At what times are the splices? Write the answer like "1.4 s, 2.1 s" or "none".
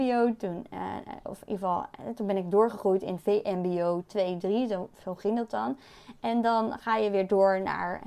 none